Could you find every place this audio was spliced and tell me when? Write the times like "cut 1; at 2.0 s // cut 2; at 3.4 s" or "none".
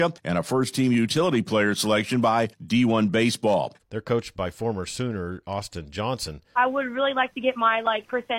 cut 1; at 3.8 s // cut 2; at 6.5 s